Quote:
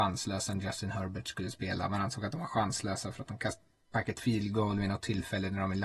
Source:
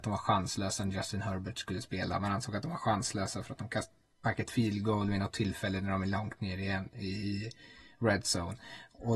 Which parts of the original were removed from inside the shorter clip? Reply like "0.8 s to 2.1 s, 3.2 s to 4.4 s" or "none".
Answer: none